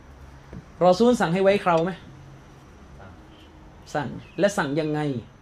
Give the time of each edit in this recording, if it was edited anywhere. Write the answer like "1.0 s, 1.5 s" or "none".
4.3 s